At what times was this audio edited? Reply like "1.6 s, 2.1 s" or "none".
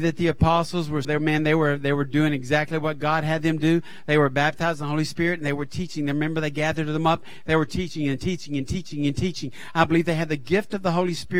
1.0 s